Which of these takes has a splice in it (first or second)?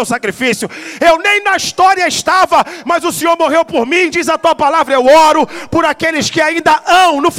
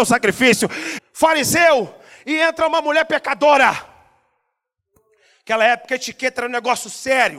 second